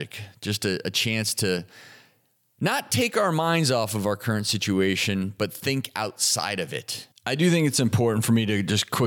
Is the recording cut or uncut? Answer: cut